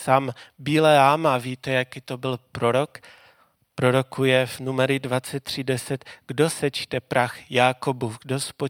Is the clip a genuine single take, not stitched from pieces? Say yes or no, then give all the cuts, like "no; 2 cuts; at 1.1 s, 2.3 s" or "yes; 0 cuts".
yes; 0 cuts